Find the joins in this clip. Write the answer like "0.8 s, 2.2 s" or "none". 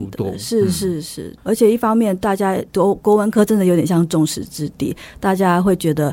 2.7 s